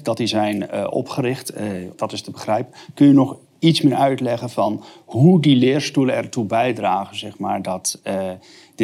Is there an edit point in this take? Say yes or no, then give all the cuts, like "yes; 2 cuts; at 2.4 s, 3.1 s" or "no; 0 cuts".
yes; 1 cut; at 1.9 s